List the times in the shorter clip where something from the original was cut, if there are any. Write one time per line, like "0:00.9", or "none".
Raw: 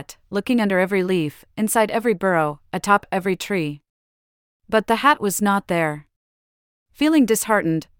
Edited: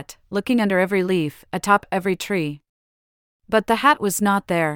0:01.5